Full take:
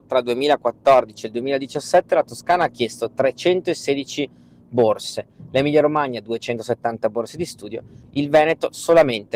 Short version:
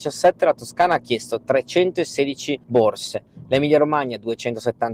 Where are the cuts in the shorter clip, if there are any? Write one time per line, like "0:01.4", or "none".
0:02.6